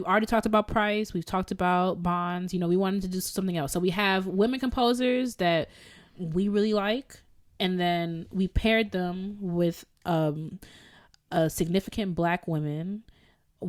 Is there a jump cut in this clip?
no; 0 cuts

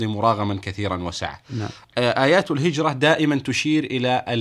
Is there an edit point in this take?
no; 0 cuts

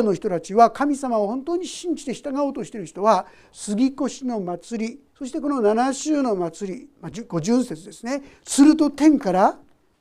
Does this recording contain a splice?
yes; 1 cut; at 8.4 s

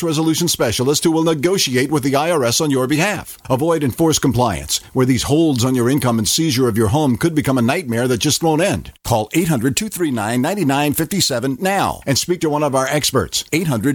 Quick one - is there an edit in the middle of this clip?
yes; 1 cut; at 3.4 s

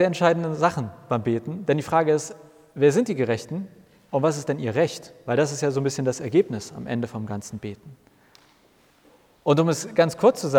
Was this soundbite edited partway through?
no; 0 cuts

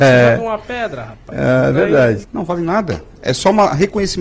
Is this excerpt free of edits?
no; 1 cut; at 2.2 s

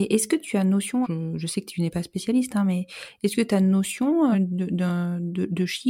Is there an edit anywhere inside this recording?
yes; 2 cuts; at 1.0 s, 4.3 s

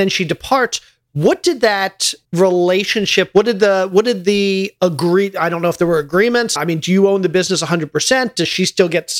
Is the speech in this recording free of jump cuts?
no; 2 cuts; at 2.2 s, 6.6 s

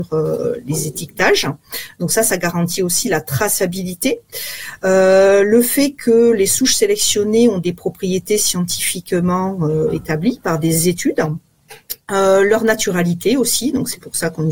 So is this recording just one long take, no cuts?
yes; 0 cuts

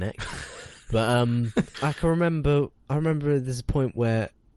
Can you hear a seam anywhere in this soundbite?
yes; 1 cut; at 1.7 s

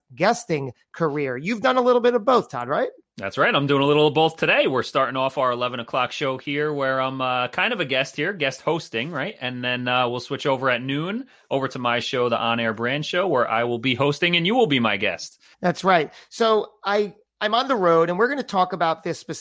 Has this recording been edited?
yes; 1 cut; at 15.5 s

